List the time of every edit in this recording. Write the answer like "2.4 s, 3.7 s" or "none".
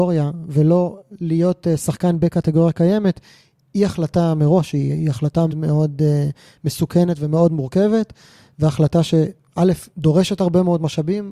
5.5 s, 9.9 s